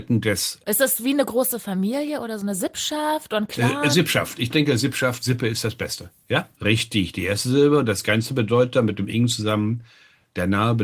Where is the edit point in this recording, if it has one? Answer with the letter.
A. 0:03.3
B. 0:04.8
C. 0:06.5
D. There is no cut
C